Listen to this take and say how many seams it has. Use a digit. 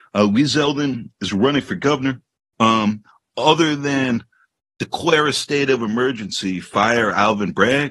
1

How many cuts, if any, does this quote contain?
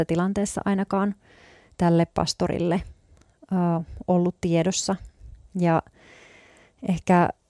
0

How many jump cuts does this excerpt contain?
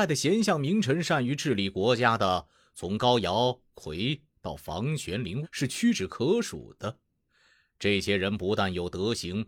1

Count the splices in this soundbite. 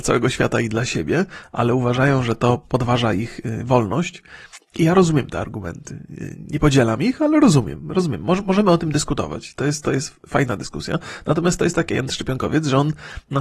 0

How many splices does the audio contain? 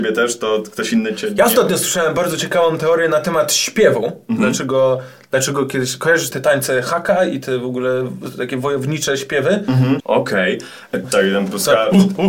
3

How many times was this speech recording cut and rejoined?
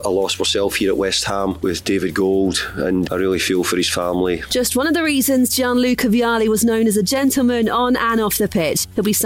2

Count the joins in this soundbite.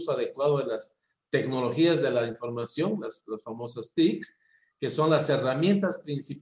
0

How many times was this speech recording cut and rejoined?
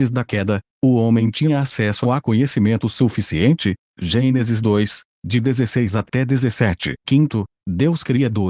1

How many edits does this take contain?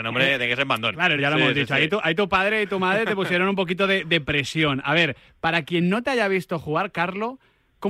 1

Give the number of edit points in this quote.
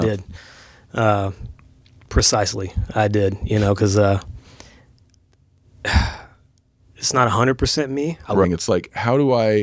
1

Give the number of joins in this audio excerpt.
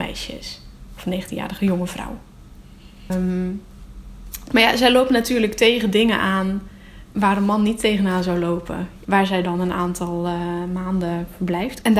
2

